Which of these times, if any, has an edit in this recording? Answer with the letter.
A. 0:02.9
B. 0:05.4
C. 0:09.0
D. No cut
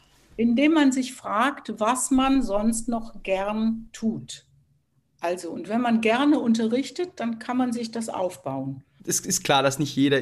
C